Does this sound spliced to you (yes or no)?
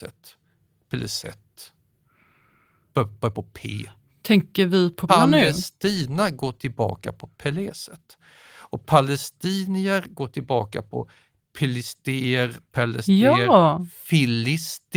yes